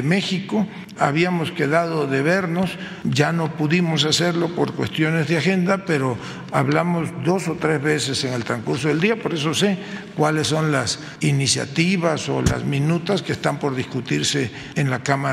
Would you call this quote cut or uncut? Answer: cut